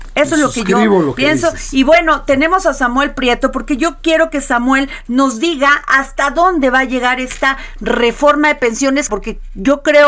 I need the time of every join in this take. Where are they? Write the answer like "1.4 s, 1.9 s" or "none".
9.1 s